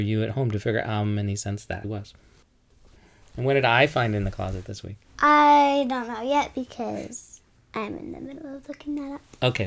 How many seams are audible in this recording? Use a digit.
2